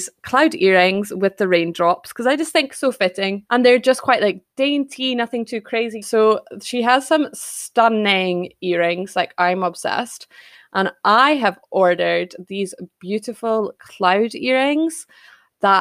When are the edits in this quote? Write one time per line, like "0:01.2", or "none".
0:03.5
0:06.0